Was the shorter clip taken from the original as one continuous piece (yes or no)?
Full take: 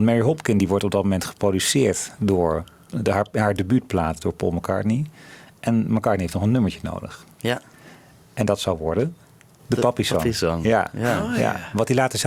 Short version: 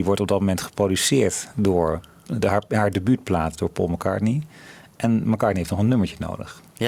yes